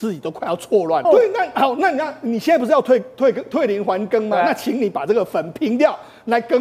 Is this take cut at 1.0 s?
yes; 1 cut; at 1.0 s

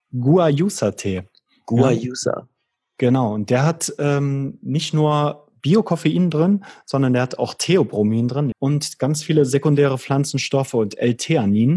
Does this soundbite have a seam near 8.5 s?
yes; 1 cut; at 8.5 s

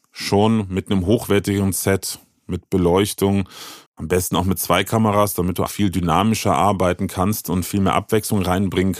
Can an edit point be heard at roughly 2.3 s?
no; 2 cuts; at 3.9 s, 5.7 s

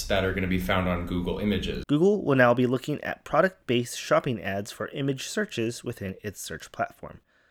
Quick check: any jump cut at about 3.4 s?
no; 1 cut; at 1.8 s

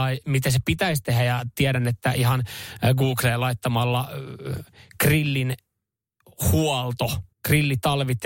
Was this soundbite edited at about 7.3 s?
yes; 1 cut; at 7.3 s

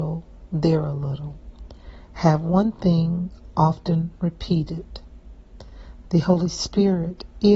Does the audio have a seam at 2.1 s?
no; 1 cut; at 6.0 s

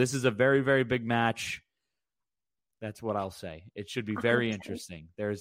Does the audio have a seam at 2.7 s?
yes; 1 cut; at 2.7 s

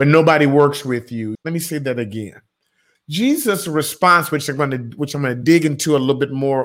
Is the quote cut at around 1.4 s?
yes; 2 cuts; at 1.4 s, 3.0 s

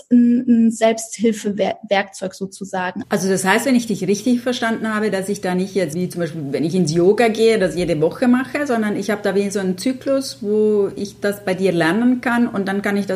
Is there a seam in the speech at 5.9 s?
yes; 2 cuts; at 3.0 s, 5.9 s

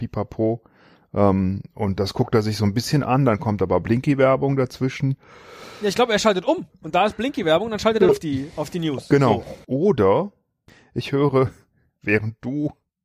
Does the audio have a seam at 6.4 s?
no; 2 cuts; at 8.1 s, 9.6 s

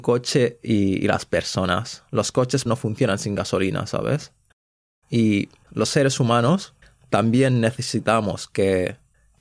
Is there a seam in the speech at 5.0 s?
no; 1 cut; at 2.7 s

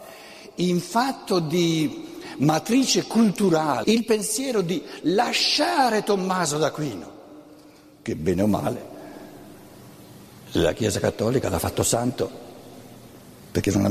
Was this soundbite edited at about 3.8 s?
yes; 1 cut; at 3.8 s

